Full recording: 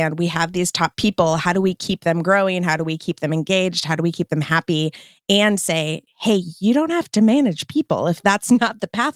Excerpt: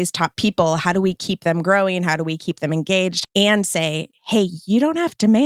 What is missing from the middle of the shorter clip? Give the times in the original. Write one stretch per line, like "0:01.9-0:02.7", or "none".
0:03.8-0:05.2